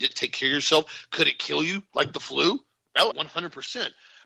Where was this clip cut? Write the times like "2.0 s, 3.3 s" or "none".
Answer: 3.1 s